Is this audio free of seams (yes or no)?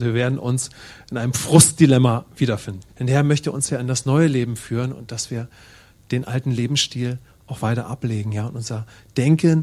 no